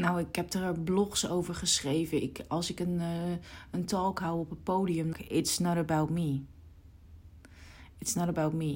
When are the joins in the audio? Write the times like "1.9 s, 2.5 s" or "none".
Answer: 5.1 s